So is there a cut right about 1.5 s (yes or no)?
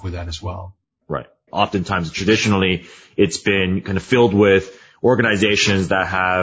yes